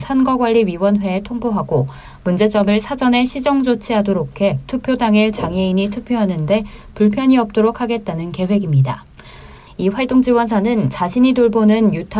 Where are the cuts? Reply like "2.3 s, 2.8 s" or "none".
9.7 s